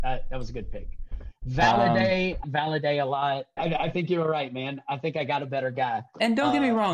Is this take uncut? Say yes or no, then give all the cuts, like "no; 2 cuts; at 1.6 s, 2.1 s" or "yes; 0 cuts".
no; 2 cuts; at 2.4 s, 3.6 s